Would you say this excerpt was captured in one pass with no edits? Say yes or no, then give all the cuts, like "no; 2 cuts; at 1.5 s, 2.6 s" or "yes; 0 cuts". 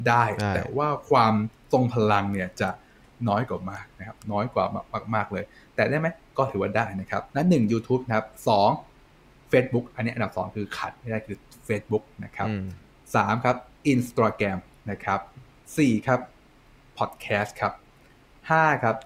no; 1 cut; at 7.3 s